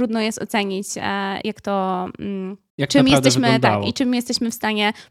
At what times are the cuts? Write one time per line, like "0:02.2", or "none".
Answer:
0:01.4
0:02.7